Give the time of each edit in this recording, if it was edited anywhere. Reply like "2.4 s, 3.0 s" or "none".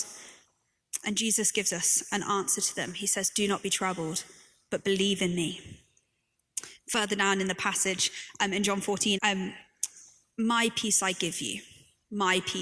9.2 s